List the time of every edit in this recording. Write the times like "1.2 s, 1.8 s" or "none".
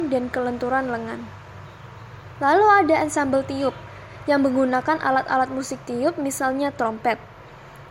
none

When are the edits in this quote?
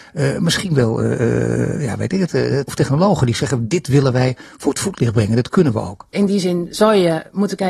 2.7 s, 6.1 s

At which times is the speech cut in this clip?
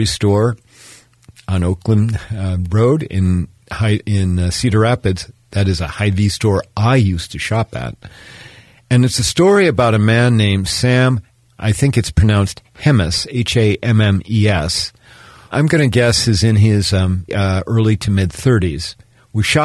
15.5 s, 17.3 s

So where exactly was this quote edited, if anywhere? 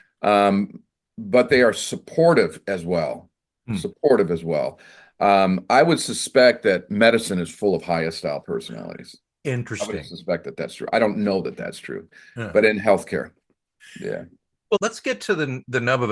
6.9 s, 14.8 s

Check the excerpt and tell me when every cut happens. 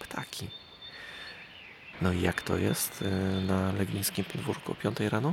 1.9 s

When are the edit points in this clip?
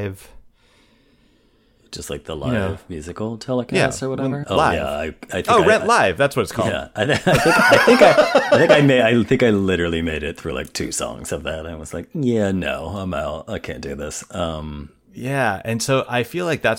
4.4 s

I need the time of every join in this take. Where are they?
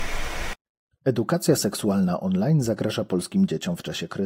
none

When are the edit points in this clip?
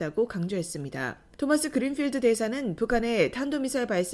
1.3 s

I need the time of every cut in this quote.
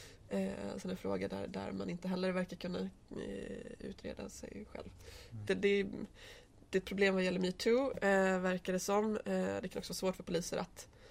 5.5 s

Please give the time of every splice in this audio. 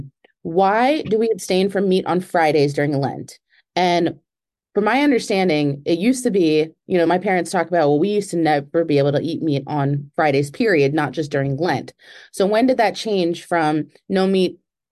none

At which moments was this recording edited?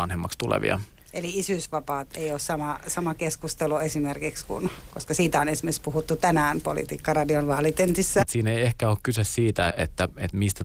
8.2 s, 9.7 s

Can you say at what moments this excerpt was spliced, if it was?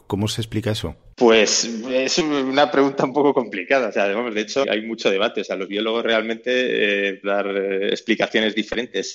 4.6 s, 7.2 s

